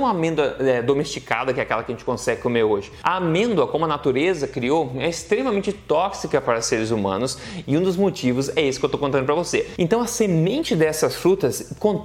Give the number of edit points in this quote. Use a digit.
0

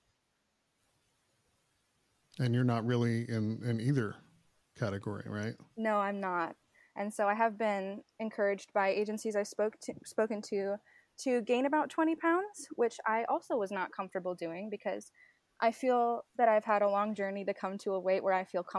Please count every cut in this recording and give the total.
1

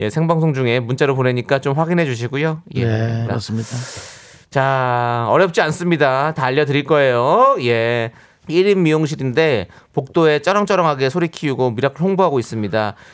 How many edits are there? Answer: 2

